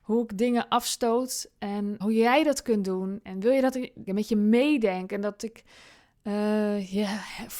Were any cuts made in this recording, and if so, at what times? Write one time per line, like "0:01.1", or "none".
0:02.0
0:04.1